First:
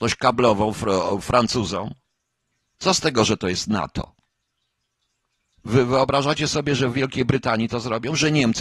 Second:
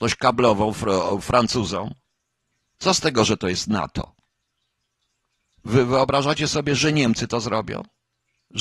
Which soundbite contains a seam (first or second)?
second